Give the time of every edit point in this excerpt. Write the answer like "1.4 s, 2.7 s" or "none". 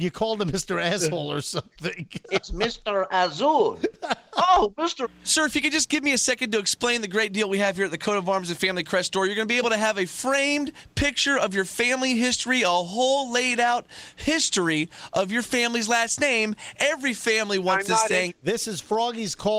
5.0 s, 18.3 s